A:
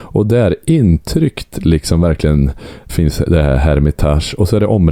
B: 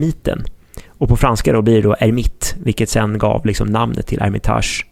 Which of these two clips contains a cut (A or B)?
A